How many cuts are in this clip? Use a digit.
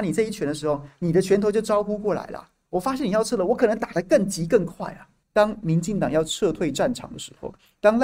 1